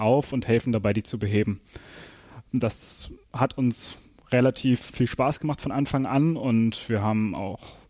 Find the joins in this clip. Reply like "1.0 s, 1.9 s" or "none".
4.9 s